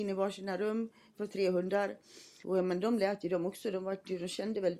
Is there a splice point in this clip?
yes; 1 cut; at 2.4 s

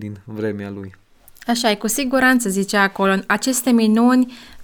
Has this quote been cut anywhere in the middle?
no; 0 cuts

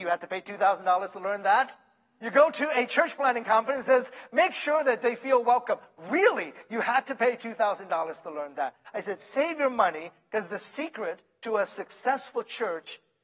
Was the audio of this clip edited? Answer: no; 0 cuts

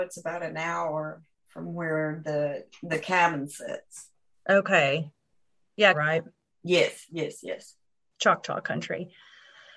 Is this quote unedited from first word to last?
no; 1 cut; at 5.9 s

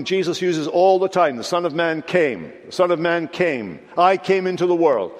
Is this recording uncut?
yes; 0 cuts

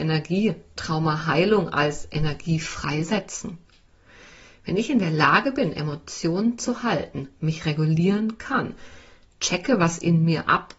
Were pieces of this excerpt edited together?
no; 0 cuts

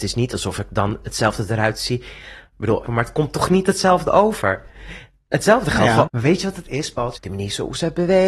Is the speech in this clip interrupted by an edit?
yes; 3 cuts; at 2.9 s, 6.1 s, 7.2 s

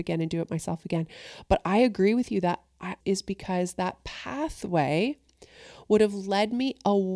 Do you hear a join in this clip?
yes; 1 cut; at 3.0 s

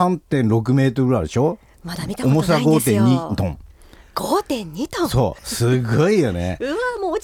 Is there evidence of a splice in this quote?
no; 0 cuts

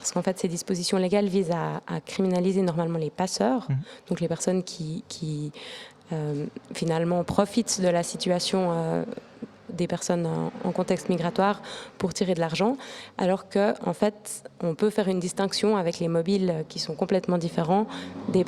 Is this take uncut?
no; 1 cut; at 9.7 s

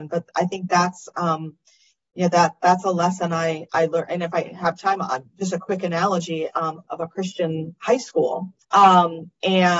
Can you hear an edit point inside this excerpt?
yes; 2 cuts; at 6.8 s, 8.6 s

